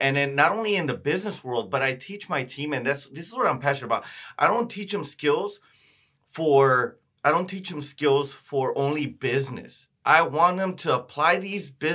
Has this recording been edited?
no; 0 cuts

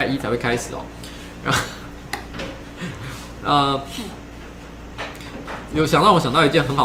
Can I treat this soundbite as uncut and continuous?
no; 1 cut; at 5.7 s

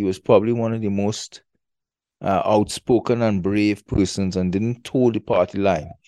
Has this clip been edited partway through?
no; 0 cuts

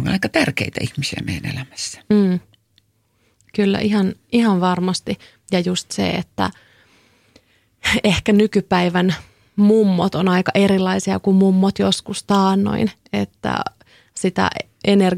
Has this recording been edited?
no; 0 cuts

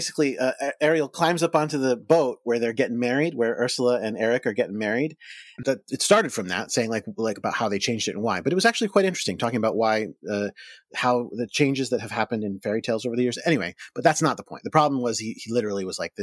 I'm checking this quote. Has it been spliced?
yes; 1 cut; at 5.6 s

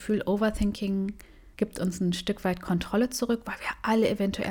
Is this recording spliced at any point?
yes; 1 cut; at 1.5 s

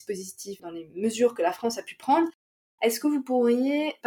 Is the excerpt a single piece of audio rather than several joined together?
yes; 0 cuts

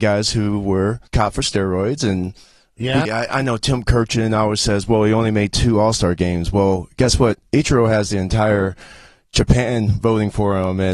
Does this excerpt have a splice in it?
yes; 2 cuts; at 1.1 s, 3.0 s

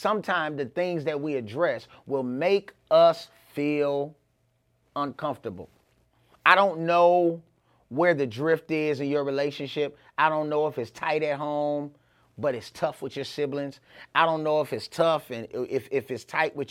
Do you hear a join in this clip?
no; 0 cuts

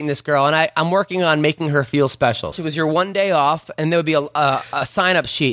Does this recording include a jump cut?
yes; 1 cut; at 2.5 s

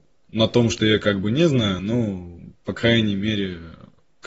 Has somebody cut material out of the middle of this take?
no; 0 cuts

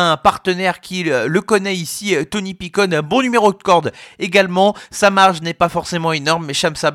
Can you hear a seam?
no; 0 cuts

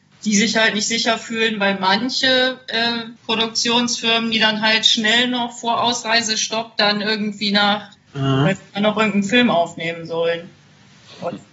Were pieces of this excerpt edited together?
yes; 2 cuts; at 3.2 s, 8.0 s

